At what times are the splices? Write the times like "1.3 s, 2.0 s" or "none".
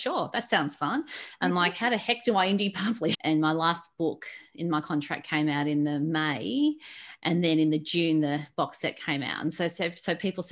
3.1 s